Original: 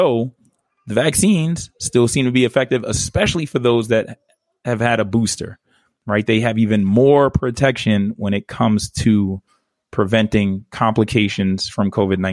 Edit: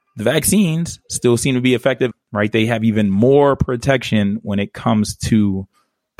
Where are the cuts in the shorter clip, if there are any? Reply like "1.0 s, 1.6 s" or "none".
2.1 s